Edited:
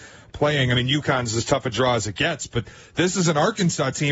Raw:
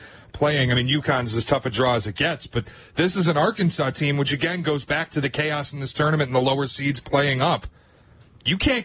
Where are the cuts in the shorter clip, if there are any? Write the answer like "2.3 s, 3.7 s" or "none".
none